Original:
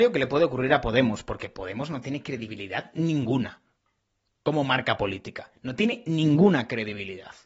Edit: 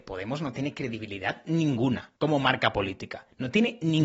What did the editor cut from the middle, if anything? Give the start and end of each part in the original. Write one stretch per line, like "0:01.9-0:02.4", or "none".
0:03.6-0:04.4